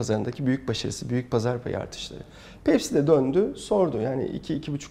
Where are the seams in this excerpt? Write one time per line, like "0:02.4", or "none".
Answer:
0:02.6